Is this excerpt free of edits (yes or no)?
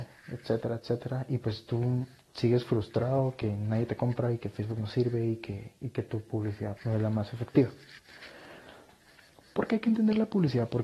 no